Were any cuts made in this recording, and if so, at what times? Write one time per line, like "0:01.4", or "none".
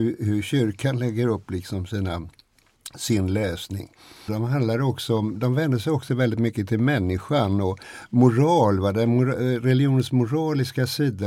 0:04.3

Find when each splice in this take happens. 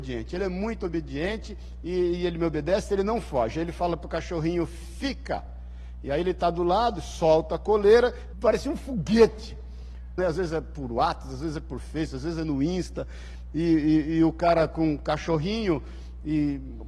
0:08.3
0:10.2

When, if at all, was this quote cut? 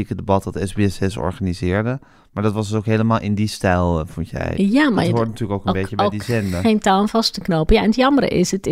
0:04.5

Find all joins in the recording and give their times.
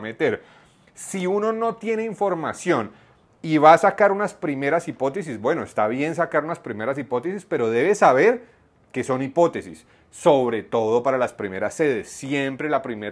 none

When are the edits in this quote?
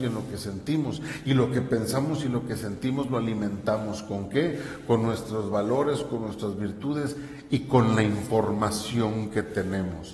none

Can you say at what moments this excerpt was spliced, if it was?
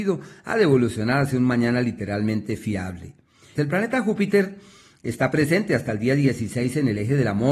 0:03.6

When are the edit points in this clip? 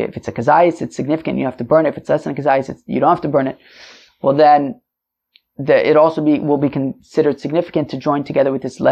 none

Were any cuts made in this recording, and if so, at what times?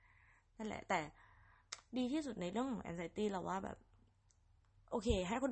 none

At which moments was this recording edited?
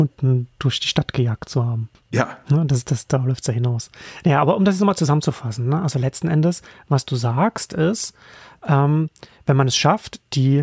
none

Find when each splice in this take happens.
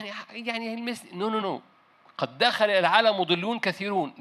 0:01.4

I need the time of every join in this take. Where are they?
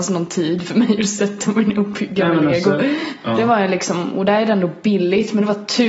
0:03.2

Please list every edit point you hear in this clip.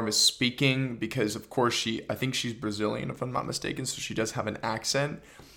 none

